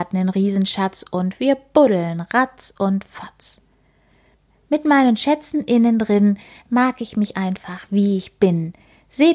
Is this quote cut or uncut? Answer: uncut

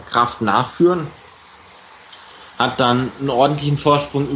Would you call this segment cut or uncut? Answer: uncut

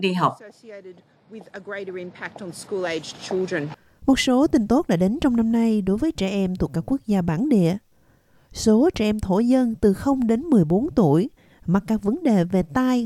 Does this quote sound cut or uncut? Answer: uncut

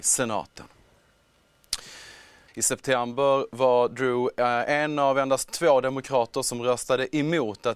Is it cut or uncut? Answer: cut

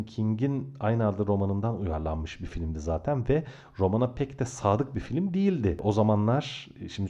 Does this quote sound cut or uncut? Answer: uncut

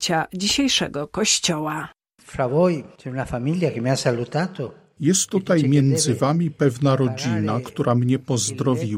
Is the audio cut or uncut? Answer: uncut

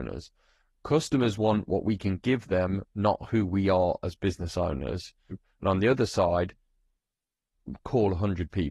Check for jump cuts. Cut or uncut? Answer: cut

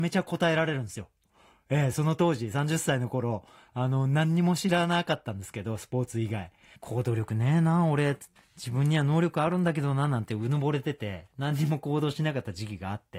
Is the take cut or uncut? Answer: cut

